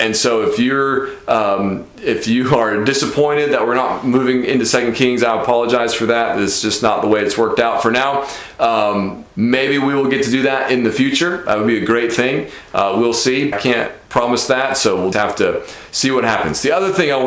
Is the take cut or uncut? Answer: cut